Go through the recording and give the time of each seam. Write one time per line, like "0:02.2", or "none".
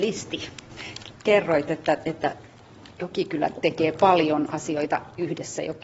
none

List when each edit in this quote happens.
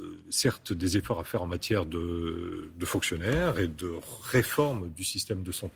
none

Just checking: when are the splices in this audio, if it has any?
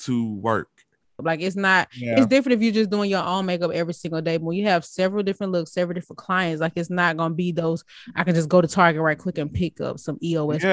0:01.2

